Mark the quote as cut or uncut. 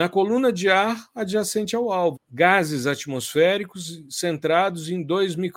cut